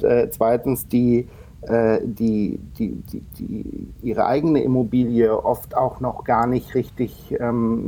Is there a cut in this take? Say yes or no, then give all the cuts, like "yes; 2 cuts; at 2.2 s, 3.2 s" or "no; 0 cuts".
no; 0 cuts